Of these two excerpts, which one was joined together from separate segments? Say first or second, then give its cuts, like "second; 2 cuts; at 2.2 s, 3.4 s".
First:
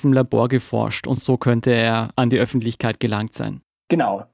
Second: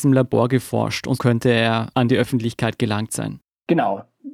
second; 1 cut; at 1.2 s